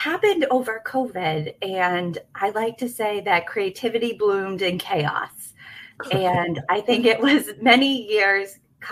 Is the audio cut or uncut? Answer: uncut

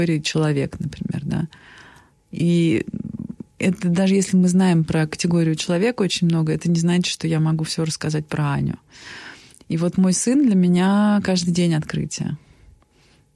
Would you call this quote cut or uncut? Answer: uncut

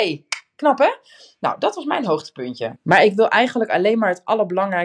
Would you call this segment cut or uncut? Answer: cut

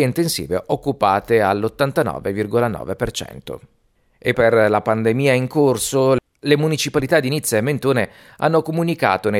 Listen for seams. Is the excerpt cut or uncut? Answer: cut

